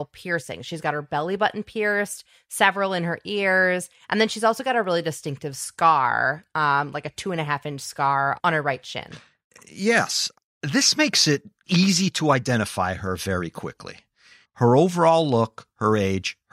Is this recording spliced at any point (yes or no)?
yes